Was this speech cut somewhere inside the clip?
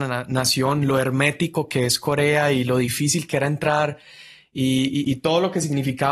no; 0 cuts

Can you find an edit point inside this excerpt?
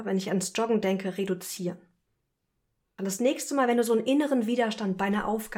yes; 1 cut; at 3.0 s

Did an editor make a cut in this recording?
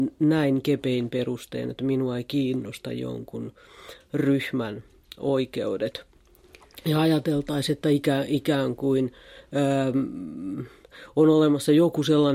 no; 0 cuts

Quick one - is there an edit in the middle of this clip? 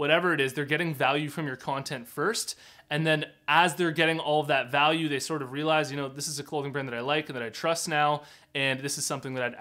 no; 0 cuts

